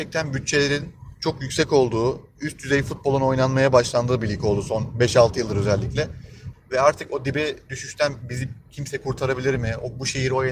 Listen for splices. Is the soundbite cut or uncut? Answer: cut